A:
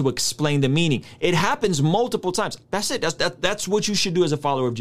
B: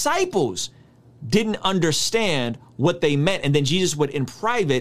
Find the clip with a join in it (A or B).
A